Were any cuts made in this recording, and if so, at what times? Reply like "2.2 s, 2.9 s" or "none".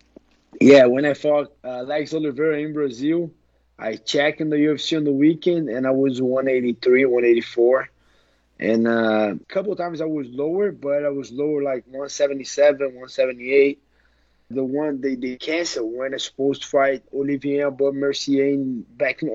9.4 s, 14.5 s